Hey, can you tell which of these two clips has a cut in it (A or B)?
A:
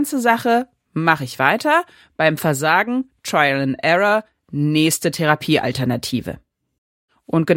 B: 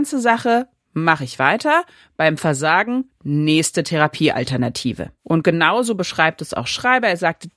B